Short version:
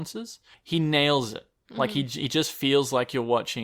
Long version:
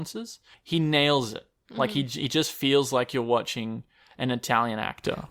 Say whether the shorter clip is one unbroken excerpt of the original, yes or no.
yes